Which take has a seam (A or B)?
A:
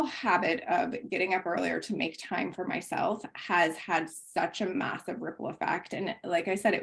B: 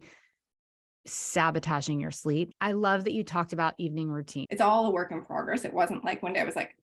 B